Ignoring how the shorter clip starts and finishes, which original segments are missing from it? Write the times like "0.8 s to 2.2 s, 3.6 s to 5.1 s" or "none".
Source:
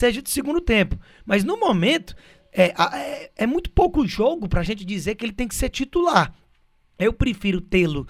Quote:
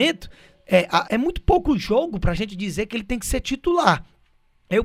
2.9 s to 3.3 s